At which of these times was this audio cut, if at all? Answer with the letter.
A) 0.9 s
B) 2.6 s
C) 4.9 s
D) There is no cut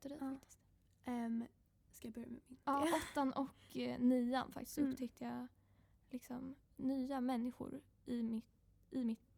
B